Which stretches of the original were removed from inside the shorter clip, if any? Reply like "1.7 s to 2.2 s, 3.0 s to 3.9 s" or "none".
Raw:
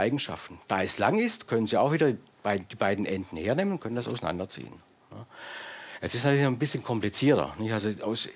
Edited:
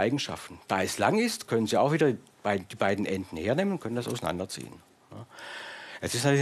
none